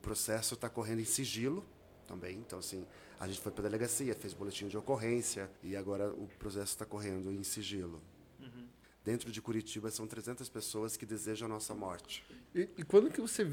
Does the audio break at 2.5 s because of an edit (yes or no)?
no